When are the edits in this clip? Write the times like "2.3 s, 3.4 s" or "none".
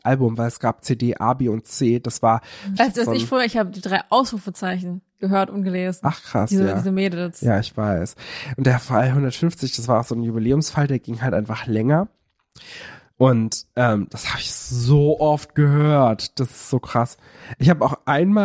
2.8 s